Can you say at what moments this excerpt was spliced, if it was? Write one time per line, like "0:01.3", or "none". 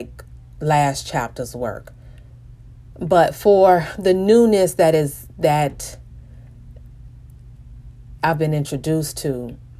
0:02.9

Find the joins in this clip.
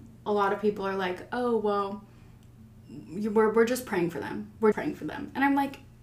0:04.7

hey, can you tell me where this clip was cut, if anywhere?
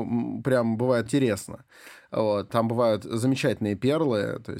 0:01.1
0:02.5

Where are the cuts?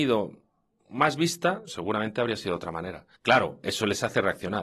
0:03.1

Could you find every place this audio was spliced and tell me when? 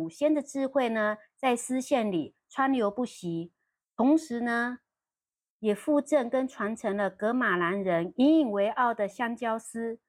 none

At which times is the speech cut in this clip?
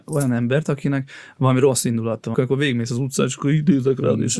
0:02.3

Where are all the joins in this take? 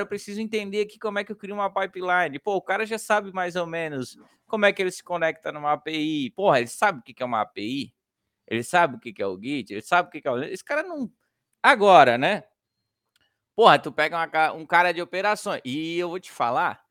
0:11.5

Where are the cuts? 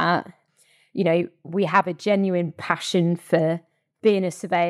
0:01.4

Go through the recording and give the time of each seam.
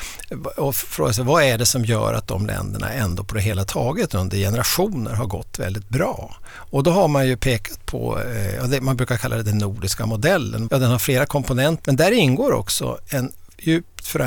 0:10.7
0:11.8

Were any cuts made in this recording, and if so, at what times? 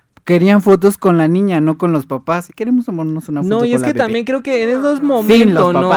0:02.5

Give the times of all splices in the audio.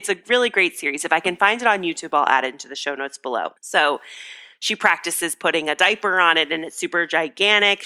0:03.6

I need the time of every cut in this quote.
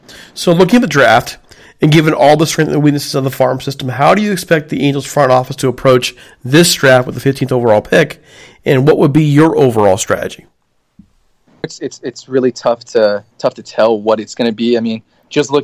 0:11.6
0:13.3

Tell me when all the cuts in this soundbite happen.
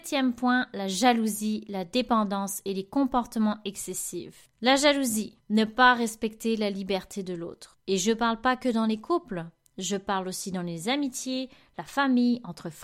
none

